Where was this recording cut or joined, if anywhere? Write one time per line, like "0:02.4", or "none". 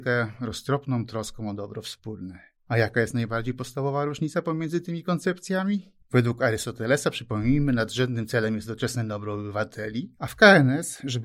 none